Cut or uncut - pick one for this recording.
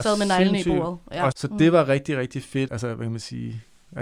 cut